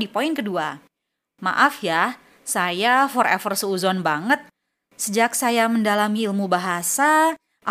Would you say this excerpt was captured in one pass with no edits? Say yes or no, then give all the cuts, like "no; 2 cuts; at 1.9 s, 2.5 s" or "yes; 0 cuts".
yes; 0 cuts